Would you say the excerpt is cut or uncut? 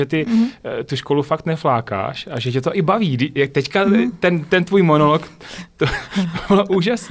uncut